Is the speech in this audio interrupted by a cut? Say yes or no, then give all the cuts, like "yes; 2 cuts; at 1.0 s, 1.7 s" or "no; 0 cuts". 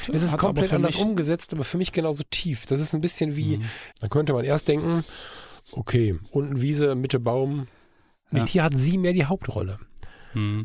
yes; 2 cuts; at 3.9 s, 8.5 s